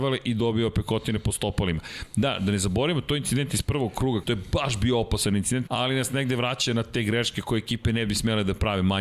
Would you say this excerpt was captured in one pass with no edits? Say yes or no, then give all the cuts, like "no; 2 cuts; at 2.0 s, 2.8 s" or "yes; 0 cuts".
no; 2 cuts; at 4.2 s, 5.7 s